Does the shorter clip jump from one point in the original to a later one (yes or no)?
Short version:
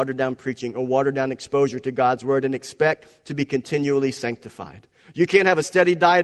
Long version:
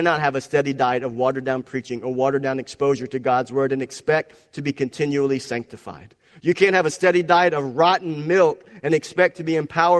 no